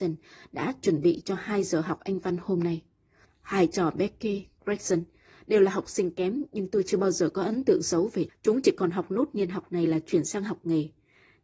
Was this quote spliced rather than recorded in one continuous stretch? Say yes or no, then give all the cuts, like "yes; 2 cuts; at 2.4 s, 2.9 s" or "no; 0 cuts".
yes; 2 cuts; at 3.2 s, 8.3 s